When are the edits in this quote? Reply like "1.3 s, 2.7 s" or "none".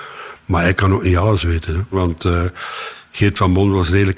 1.9 s